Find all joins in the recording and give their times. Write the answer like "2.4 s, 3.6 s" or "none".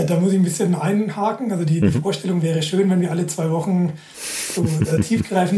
none